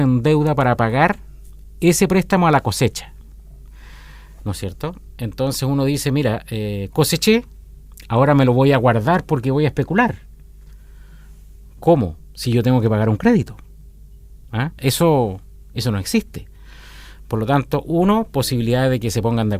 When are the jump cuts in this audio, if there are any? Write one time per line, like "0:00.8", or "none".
0:14.8